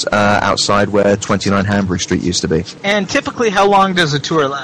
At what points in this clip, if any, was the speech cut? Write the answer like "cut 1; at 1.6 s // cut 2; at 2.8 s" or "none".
cut 1; at 2.8 s